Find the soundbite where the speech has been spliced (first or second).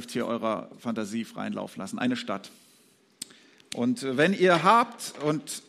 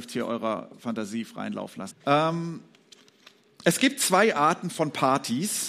second